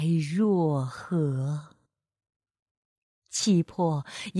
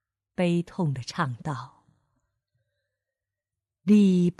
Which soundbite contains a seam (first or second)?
first